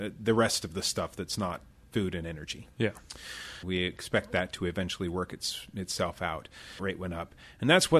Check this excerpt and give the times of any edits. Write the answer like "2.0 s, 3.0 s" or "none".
3.6 s, 6.8 s